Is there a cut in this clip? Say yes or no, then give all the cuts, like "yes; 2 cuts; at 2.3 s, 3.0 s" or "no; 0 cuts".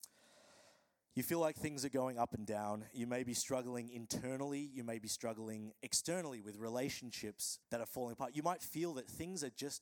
yes; 1 cut; at 7.6 s